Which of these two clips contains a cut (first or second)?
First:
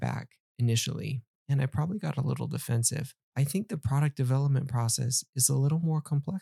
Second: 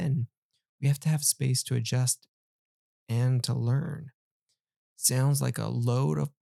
first